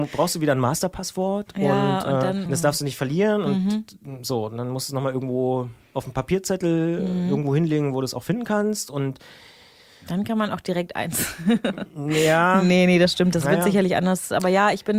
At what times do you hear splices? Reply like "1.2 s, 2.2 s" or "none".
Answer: 2.5 s